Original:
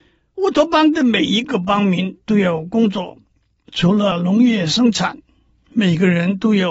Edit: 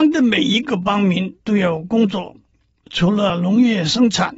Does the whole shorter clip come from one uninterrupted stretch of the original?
yes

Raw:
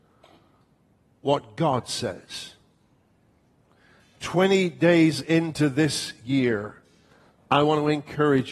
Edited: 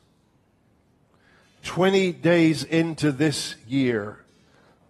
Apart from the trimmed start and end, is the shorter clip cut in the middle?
no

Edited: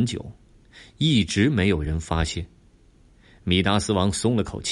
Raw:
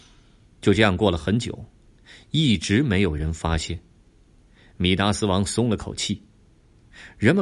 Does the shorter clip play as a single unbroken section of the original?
yes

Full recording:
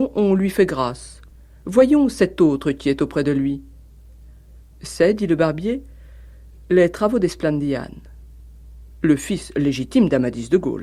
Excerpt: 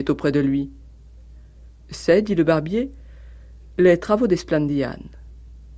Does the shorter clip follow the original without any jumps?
yes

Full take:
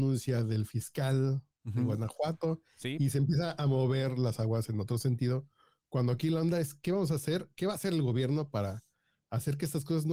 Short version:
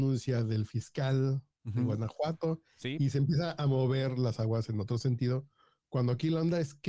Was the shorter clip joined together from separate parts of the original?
no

